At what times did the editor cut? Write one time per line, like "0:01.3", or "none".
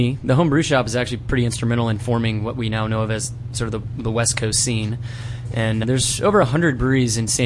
0:05.8